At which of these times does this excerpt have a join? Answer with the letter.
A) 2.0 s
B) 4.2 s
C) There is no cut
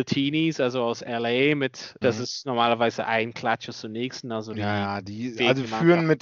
A